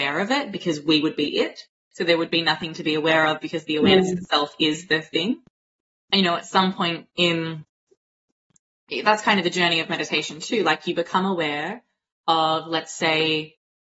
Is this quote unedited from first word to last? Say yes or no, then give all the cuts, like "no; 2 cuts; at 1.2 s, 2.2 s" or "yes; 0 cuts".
yes; 0 cuts